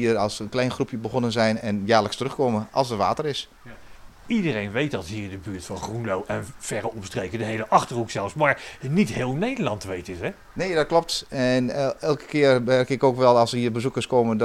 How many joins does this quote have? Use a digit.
0